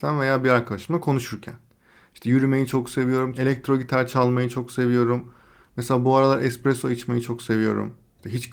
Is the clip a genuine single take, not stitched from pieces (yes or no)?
no